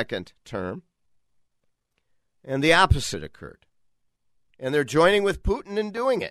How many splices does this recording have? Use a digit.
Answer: 1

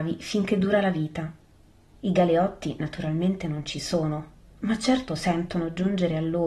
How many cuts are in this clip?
1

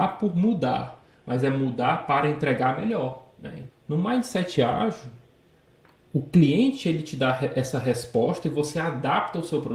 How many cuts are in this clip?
1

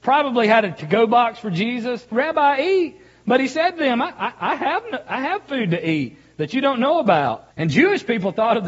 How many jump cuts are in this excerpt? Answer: 2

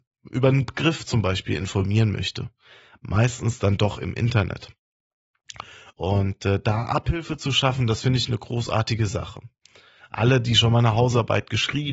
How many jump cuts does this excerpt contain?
2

